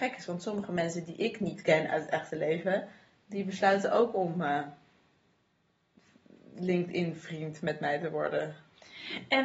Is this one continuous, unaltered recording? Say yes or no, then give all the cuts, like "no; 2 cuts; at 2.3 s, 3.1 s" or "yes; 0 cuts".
yes; 0 cuts